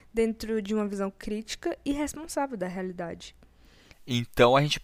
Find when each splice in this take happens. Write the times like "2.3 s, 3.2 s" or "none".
3.9 s